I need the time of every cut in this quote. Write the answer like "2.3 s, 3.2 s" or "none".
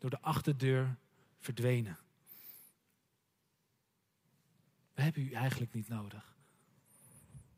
none